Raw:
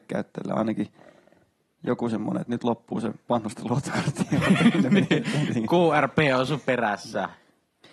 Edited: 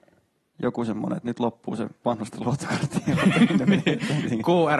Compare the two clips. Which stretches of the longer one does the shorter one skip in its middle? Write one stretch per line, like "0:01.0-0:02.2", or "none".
none

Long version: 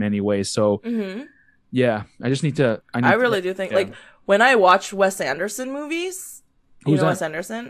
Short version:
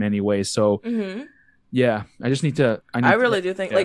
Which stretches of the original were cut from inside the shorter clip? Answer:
none

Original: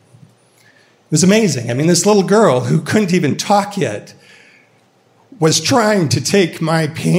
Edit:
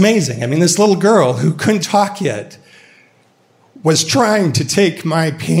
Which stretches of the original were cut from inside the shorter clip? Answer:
0:03.1-0:03.4

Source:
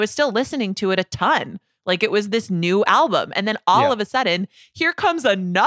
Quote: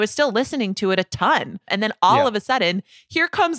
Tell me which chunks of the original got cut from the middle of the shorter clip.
0:01.7-0:03.3

